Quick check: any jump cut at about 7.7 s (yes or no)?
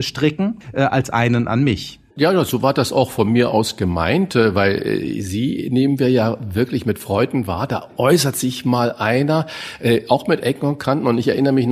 no